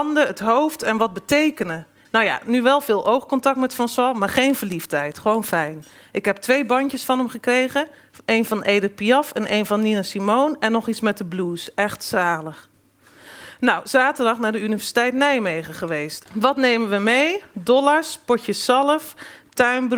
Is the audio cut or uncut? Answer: cut